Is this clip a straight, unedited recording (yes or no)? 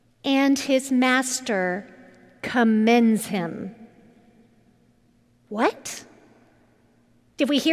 yes